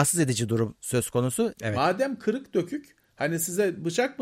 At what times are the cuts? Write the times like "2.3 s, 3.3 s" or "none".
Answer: 1.6 s